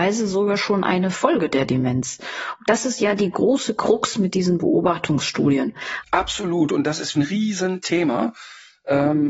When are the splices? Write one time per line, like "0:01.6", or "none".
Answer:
0:06.0
0:07.1